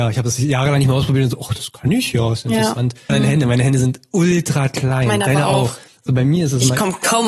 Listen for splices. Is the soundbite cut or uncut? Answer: cut